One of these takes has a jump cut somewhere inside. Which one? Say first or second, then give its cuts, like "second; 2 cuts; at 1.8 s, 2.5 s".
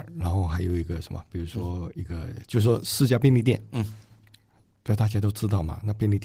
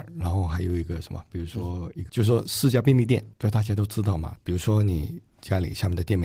second; 3 cuts; at 2.1 s, 3.3 s, 4.4 s